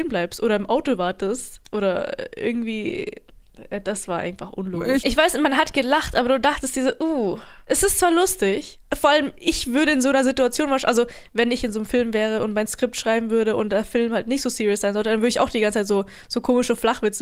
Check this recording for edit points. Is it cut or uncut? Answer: cut